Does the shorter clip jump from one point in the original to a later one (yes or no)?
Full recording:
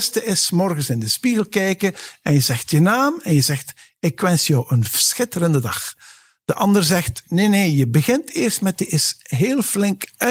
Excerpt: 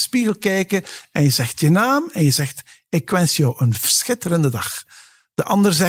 no